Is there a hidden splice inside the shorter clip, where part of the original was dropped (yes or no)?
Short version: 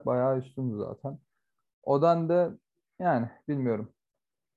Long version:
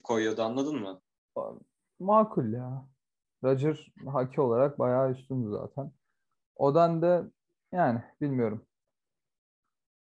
no